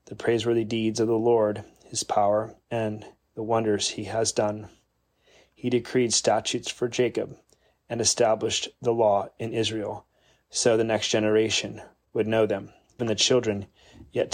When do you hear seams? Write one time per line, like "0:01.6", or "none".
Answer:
0:10.4
0:13.0